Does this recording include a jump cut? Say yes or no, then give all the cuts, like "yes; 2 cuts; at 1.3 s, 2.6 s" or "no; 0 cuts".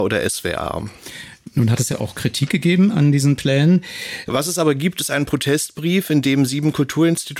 yes; 2 cuts; at 1.9 s, 4.2 s